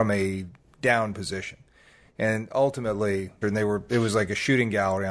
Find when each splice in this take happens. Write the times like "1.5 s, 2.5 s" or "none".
3.4 s